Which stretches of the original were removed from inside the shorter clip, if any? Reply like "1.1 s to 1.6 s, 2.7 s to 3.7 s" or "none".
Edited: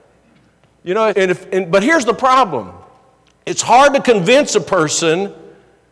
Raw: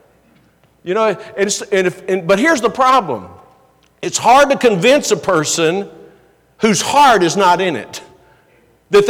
1.1 s to 1.7 s